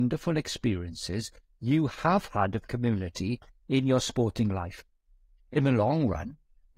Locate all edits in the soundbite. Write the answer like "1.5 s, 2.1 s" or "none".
5.4 s